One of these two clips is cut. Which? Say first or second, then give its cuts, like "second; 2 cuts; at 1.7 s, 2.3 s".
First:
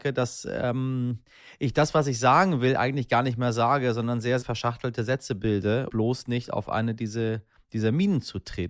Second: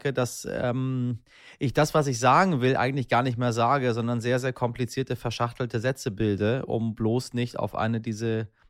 first; 2 cuts; at 4.4 s, 5.9 s